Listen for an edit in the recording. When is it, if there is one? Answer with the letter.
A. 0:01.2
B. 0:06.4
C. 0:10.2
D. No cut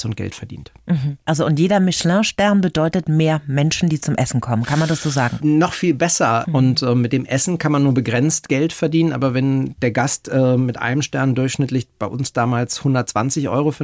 B